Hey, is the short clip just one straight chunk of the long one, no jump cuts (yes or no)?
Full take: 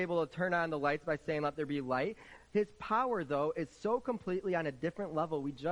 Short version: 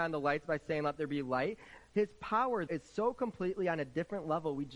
no